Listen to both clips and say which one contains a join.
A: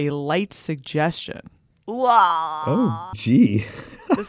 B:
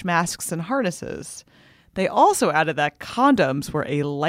A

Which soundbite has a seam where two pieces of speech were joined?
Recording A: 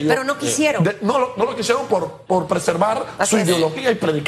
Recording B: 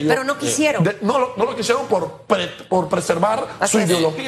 A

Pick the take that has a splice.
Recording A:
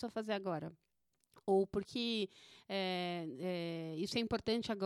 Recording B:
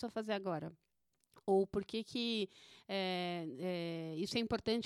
A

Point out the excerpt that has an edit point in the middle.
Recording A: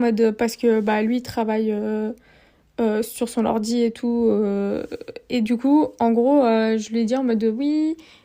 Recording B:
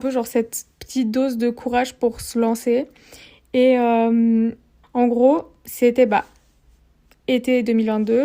B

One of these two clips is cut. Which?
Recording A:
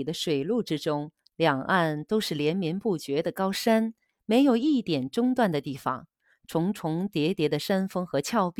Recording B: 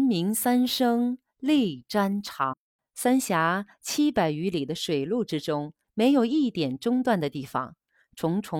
B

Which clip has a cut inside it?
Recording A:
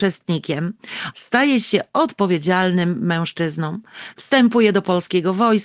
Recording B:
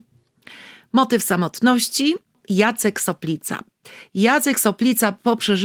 A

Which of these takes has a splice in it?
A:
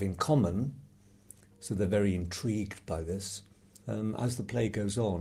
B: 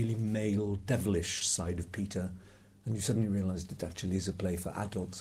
A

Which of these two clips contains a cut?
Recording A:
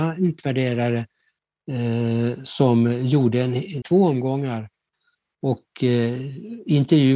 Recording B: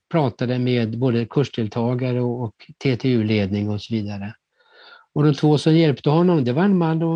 A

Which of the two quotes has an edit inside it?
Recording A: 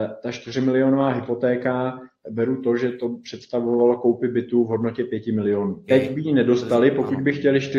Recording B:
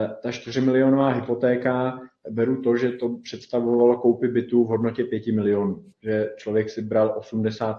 A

